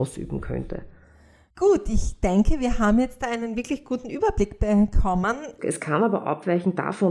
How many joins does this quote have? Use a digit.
2